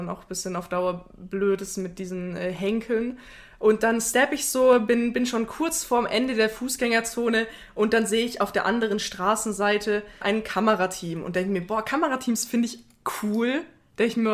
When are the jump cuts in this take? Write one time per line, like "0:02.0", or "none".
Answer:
0:10.2